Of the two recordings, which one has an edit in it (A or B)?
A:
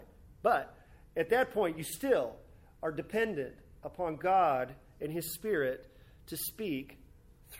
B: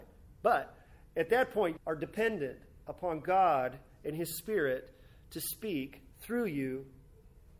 B